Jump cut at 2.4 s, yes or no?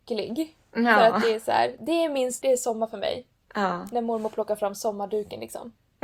yes